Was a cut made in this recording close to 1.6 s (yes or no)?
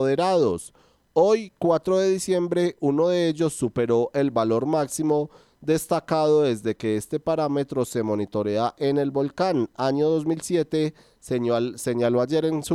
no